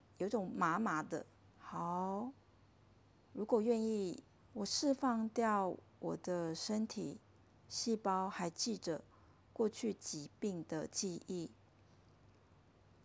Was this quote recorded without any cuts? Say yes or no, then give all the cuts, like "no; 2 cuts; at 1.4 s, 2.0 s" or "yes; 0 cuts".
no; 2 cuts; at 1.4 s, 4.4 s